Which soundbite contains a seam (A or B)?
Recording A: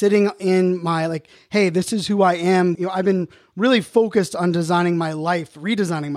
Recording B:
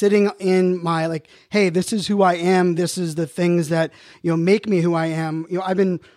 A